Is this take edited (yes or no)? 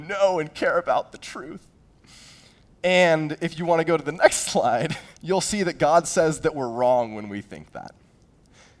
yes